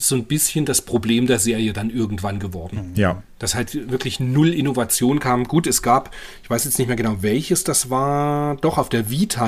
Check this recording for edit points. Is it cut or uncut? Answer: uncut